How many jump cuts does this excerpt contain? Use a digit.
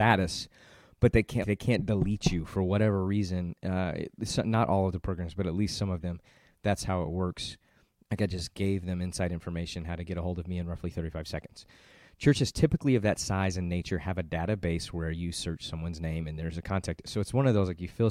2